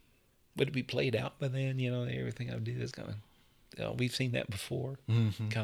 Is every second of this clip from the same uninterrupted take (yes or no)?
no